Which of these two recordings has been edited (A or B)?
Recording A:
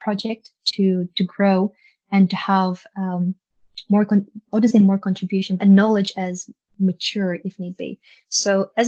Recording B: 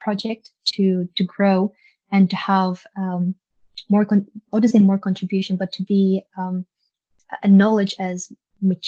A